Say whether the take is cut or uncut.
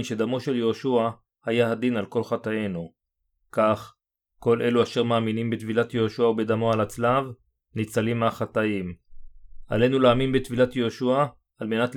uncut